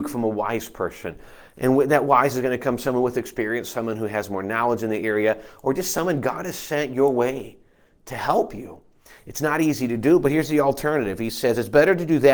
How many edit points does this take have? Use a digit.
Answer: 0